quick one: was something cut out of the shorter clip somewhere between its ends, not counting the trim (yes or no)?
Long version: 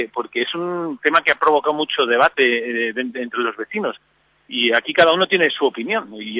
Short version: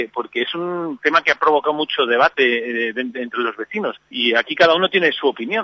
yes